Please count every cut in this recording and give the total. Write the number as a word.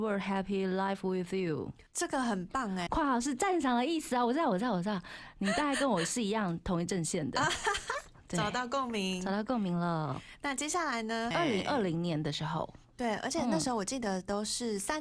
three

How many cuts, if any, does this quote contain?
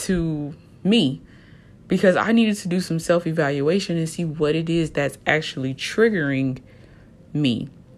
zero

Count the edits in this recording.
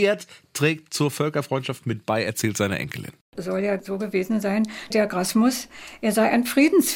one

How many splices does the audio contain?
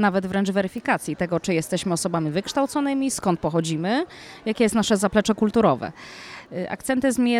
zero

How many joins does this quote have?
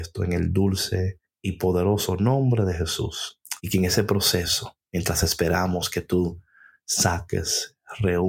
one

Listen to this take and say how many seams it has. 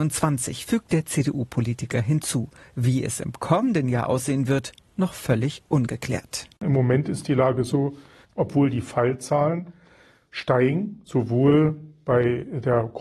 one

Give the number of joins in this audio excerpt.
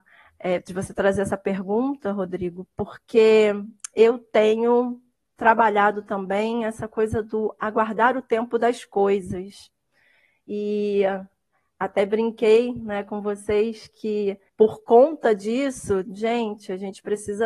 two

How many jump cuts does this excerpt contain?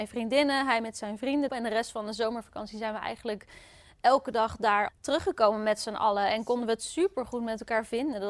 two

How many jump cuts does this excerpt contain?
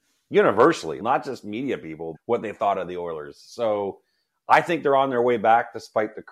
two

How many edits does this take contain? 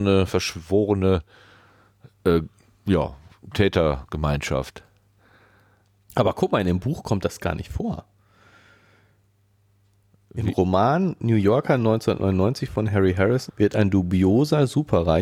one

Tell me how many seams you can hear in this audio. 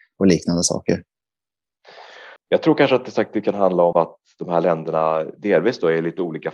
two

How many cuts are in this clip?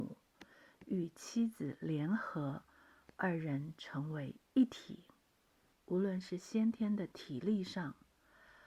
one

